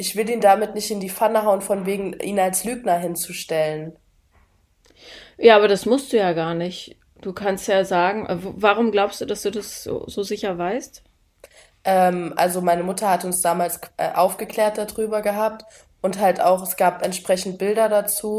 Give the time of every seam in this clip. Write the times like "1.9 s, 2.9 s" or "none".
none